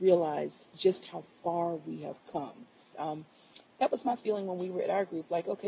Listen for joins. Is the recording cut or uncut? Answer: cut